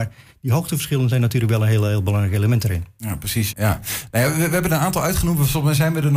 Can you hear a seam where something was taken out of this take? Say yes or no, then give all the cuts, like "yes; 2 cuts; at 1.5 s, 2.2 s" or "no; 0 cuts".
yes; 1 cut; at 3.5 s